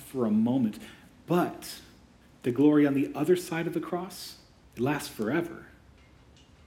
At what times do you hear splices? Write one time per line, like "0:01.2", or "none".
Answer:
0:04.6